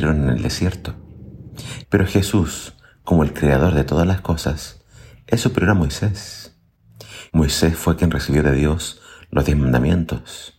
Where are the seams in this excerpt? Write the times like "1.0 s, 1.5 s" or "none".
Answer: 1.8 s, 7.3 s